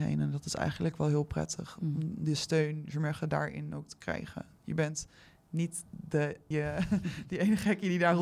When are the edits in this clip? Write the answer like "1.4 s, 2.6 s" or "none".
6.5 s